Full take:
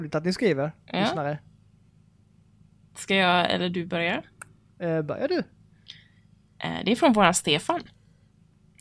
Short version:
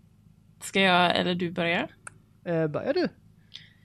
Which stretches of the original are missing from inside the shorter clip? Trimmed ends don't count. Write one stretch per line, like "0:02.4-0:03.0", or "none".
none